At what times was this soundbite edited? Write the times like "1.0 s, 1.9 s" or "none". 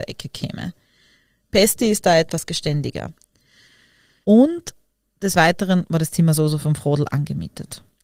4.2 s